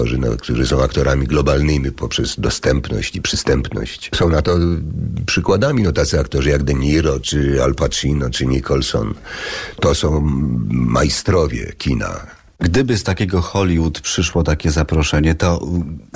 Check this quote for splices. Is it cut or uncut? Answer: uncut